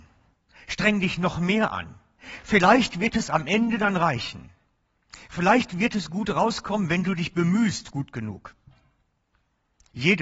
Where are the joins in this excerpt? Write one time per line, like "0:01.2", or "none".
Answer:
none